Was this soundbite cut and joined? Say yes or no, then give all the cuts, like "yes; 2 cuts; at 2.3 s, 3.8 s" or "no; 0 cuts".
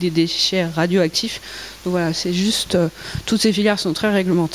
no; 0 cuts